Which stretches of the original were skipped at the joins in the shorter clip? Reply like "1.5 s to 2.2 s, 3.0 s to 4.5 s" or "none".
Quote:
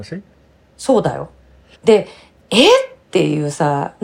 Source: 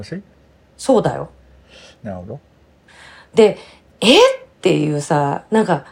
1.7 s to 3.2 s